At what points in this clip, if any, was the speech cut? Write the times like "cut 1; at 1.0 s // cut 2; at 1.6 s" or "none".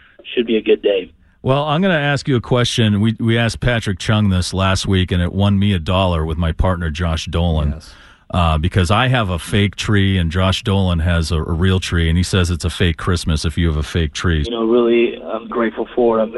cut 1; at 14.4 s // cut 2; at 15.5 s